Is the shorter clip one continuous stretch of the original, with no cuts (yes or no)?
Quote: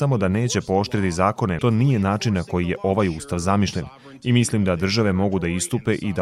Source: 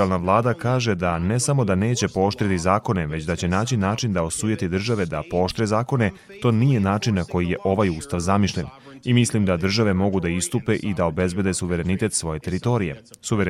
no